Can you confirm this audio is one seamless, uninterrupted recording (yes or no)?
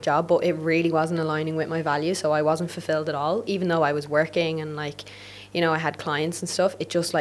yes